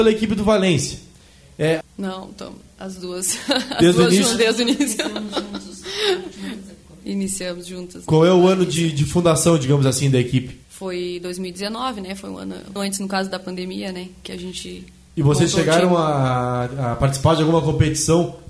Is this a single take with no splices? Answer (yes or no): no